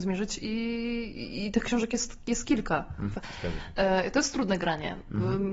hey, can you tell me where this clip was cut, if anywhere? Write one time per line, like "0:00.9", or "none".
0:03.1